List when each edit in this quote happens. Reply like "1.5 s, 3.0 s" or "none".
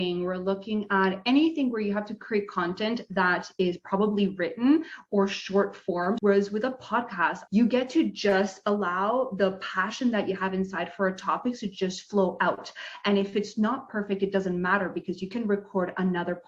6.2 s, 7.5 s